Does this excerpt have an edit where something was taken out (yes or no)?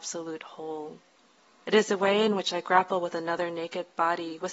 yes